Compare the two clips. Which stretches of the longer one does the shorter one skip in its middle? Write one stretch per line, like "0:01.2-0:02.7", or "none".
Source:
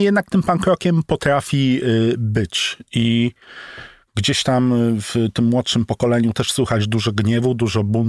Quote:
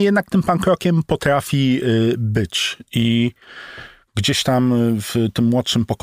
none